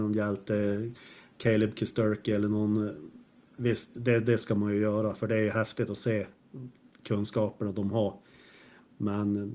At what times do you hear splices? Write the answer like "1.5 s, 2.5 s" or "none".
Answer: none